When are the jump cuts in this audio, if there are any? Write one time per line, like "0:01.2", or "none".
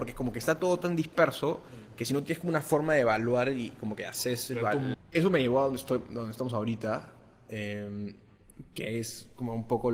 0:04.9